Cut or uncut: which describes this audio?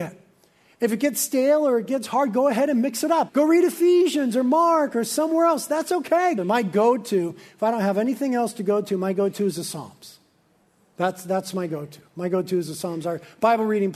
cut